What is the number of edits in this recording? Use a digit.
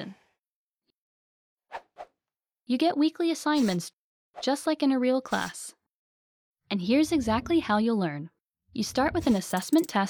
1